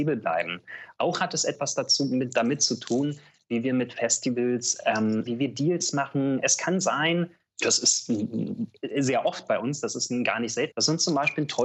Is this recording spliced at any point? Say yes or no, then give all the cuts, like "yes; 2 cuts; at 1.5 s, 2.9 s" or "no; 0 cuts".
yes; 2 cuts; at 5.3 s, 10.7 s